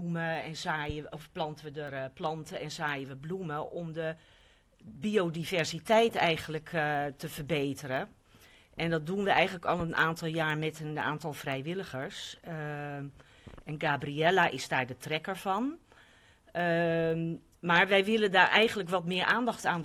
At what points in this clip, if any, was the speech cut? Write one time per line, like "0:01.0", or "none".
none